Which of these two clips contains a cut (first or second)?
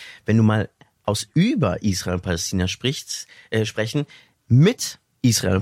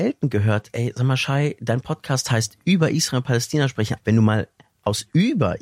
second